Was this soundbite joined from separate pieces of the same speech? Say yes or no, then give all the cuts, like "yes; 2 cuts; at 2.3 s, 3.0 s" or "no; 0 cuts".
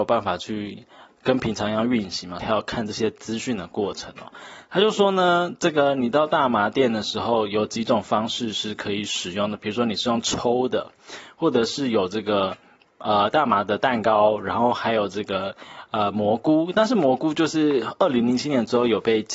yes; 1 cut; at 2.4 s